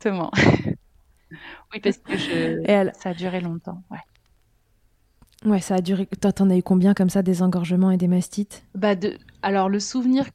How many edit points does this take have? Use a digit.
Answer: 0